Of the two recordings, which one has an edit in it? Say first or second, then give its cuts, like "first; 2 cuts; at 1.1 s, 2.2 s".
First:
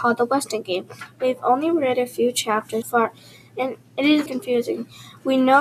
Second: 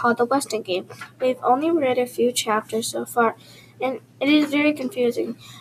first; 2 cuts; at 2.8 s, 4.3 s